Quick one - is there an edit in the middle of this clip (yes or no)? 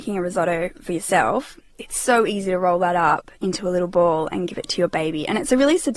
no